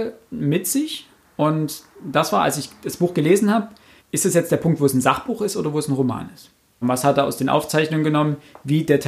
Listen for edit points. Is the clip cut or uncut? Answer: cut